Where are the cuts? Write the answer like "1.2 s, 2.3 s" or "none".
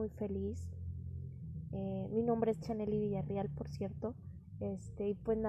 none